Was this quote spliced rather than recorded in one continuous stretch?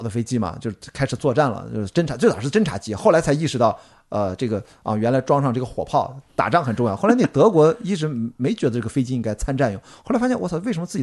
no; 0 cuts

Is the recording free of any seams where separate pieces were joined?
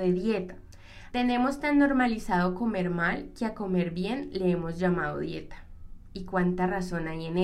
no; 1 cut; at 1.1 s

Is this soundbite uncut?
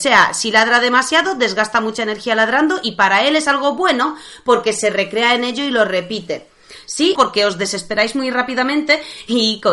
no; 1 cut; at 7.1 s

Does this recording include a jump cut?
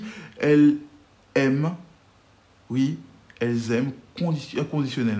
no; 0 cuts

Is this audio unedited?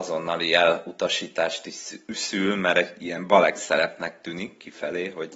yes; 0 cuts

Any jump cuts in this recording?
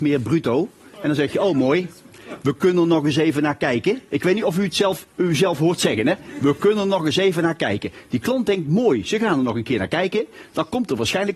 no; 0 cuts

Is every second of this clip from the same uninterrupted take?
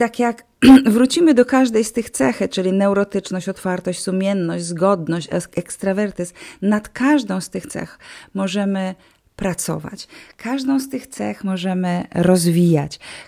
yes; 0 cuts

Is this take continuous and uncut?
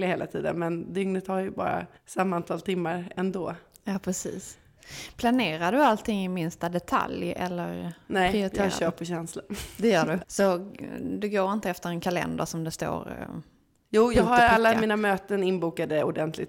no; 2 cuts; at 2.0 s, 10.2 s

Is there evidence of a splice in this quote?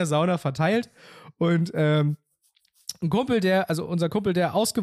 no; 0 cuts

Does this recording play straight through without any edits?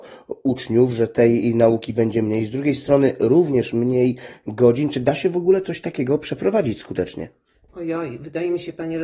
yes; 0 cuts

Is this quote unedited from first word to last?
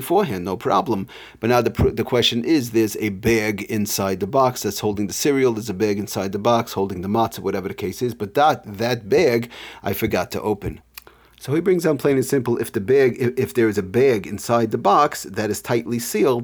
yes; 0 cuts

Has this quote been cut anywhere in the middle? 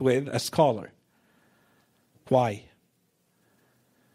no; 0 cuts

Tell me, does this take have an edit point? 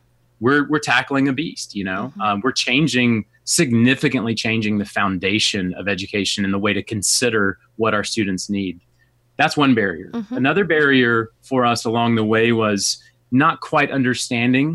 no; 0 cuts

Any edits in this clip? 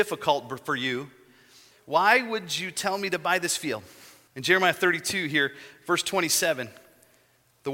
yes; 2 cuts; at 1.7 s, 4.3 s

